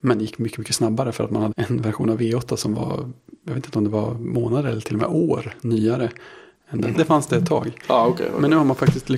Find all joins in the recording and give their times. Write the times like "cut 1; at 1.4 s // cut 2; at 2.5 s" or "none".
cut 1; at 1.5 s // cut 2; at 6.9 s